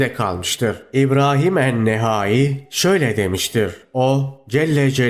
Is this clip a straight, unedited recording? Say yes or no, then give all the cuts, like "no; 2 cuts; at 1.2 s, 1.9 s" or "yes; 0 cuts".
no; 1 cut; at 3.8 s